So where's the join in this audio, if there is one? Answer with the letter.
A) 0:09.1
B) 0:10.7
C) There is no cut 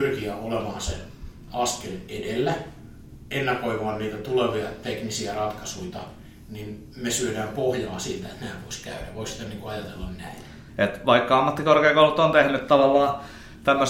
B